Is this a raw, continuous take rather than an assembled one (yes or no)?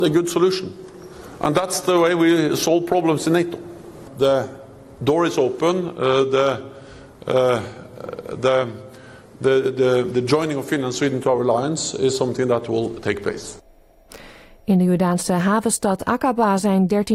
yes